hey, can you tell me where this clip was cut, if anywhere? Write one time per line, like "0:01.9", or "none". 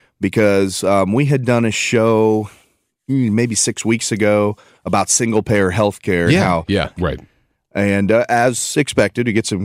0:06.9